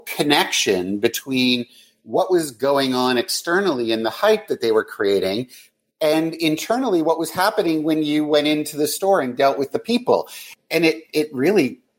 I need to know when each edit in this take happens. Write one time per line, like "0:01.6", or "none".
none

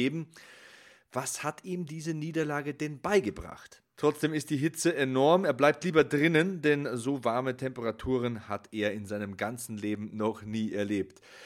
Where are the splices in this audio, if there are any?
0:03.9

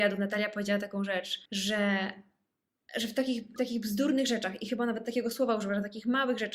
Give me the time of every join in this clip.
0:01.5
0:03.6

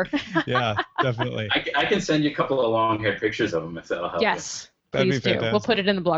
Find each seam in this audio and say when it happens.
none

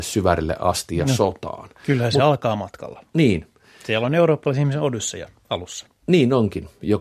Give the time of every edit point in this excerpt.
none

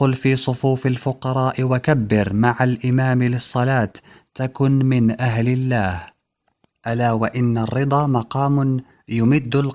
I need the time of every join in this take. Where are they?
none

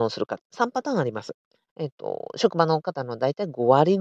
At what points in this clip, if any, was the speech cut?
0:01.7

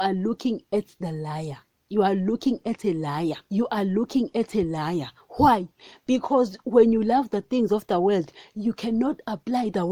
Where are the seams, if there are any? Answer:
0:03.4

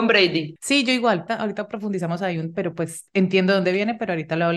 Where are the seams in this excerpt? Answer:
0:01.3
0:02.5

